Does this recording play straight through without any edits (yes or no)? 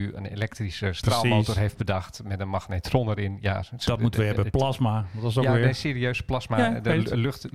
yes